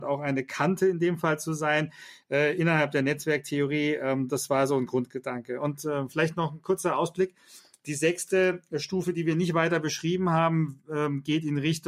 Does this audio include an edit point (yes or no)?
no